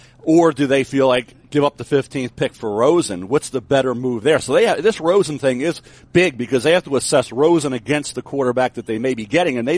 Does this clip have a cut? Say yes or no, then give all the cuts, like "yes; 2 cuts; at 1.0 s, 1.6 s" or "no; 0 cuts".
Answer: no; 0 cuts